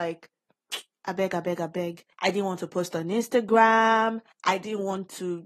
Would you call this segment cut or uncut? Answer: uncut